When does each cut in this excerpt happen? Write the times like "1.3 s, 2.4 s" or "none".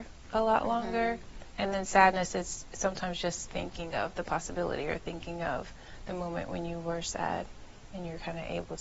3.5 s